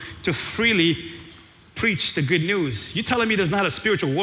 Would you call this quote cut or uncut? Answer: uncut